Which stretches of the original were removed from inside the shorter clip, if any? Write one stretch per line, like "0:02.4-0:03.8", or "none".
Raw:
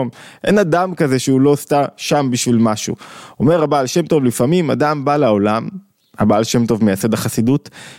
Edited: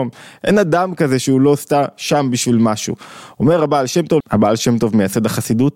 0:04.2-0:06.1